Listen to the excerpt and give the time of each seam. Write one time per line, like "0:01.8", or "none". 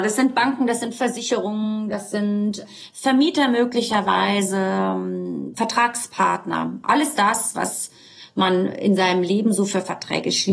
0:05.5